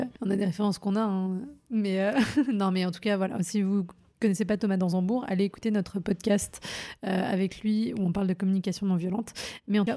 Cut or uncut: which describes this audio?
uncut